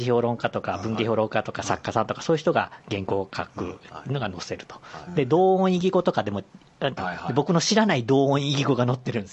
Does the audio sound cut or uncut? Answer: cut